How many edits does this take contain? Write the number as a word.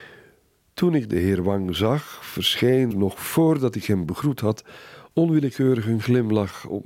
one